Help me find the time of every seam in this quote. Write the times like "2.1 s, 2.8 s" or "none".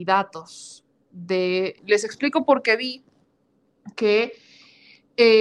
1.8 s